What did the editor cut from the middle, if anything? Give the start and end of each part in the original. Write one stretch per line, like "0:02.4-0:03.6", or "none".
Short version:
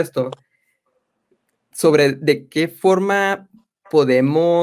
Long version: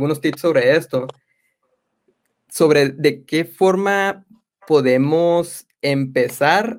none